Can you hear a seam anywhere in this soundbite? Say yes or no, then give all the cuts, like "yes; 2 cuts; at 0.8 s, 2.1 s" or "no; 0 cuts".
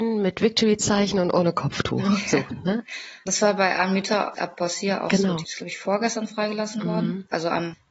no; 0 cuts